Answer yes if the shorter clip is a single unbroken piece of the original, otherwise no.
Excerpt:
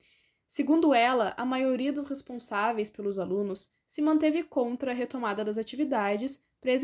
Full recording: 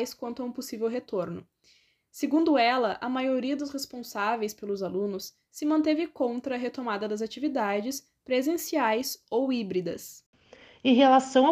yes